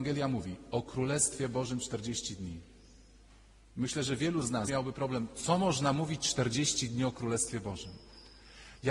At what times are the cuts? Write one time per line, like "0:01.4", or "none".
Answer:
0:04.7

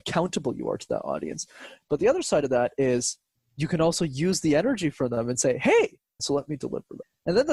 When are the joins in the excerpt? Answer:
0:06.2

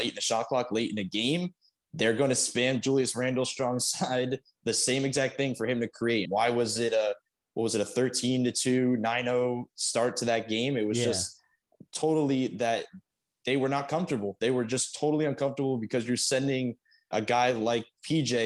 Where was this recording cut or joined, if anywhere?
0:06.3
0:17.1

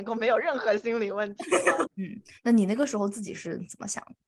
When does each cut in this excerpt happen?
0:01.9

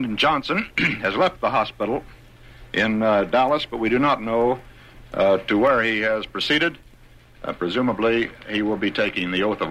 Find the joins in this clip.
none

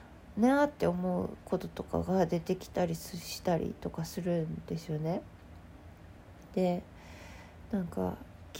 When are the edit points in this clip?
none

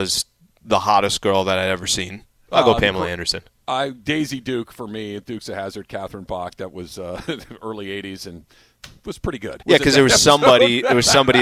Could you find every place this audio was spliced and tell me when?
0:02.5
0:09.6

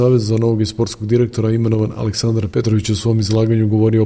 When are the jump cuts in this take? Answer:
0:02.5

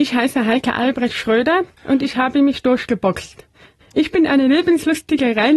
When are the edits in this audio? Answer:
0:03.8

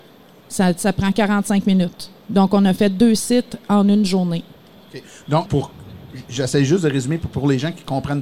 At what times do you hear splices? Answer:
0:05.5

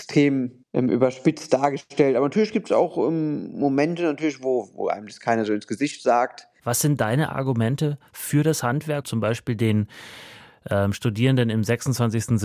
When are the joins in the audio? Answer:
0:06.6
0:09.0

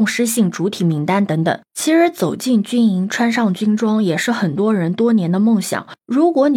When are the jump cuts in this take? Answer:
0:01.6

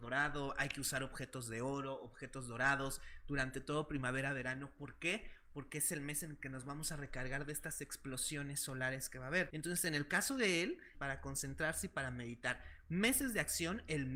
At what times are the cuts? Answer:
0:09.5
0:10.9

